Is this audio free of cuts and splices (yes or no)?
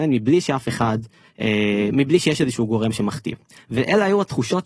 no